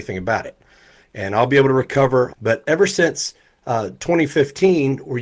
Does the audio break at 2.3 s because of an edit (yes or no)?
yes